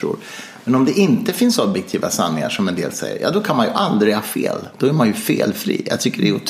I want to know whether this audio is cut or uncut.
uncut